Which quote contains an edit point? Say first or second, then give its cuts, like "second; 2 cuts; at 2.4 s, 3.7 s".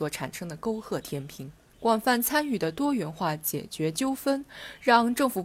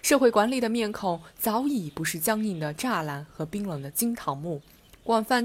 first; 1 cut; at 1.7 s